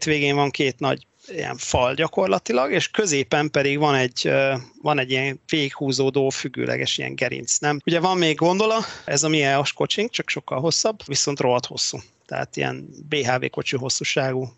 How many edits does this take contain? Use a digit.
2